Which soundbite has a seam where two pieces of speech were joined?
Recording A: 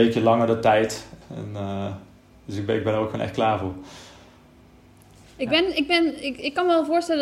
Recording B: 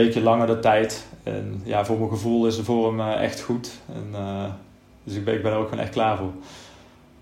A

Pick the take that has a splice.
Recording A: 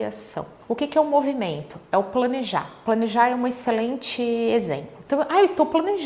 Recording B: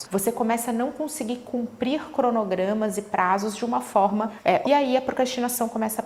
B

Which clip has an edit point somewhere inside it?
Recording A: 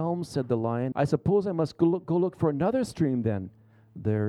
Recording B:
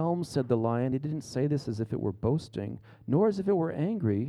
A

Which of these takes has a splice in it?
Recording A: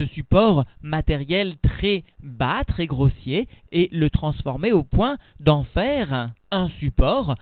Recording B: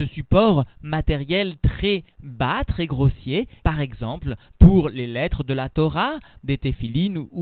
B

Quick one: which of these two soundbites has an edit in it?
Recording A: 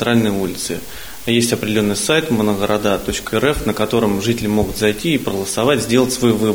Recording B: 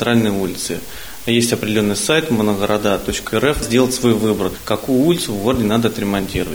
B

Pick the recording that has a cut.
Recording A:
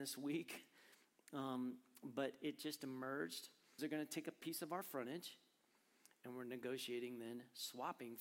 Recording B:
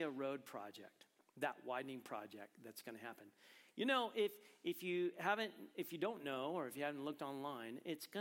A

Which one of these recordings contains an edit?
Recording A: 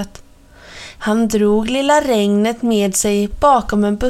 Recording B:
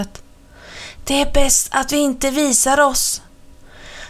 A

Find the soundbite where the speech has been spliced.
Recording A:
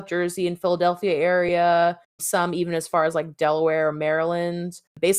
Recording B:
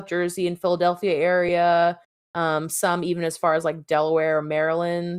A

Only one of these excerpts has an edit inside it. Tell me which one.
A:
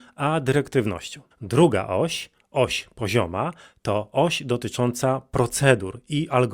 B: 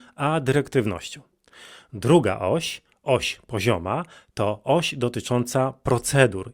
A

